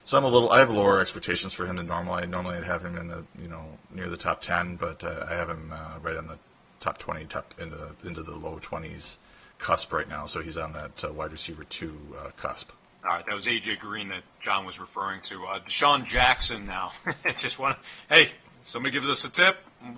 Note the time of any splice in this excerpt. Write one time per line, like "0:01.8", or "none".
0:07.6